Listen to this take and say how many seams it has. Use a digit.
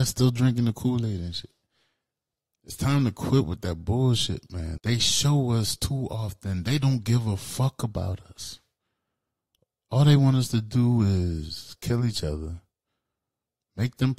1